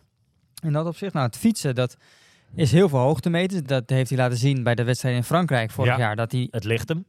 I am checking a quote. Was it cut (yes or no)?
no